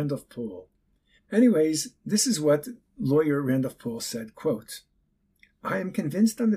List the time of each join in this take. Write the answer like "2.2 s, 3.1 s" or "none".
1.2 s, 2.9 s